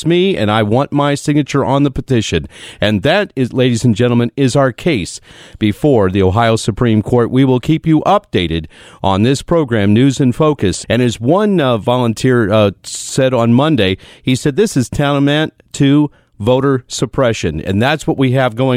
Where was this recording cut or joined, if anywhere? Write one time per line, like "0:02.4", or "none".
0:10.8